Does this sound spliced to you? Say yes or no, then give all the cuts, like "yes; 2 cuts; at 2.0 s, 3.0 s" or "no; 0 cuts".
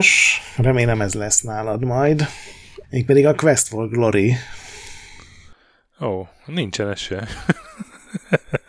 yes; 1 cut; at 2.8 s